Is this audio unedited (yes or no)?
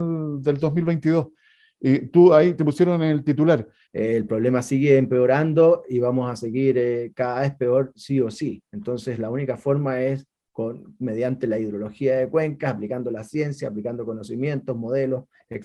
no